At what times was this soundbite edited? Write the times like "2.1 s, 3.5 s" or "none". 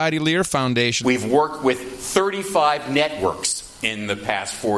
1.0 s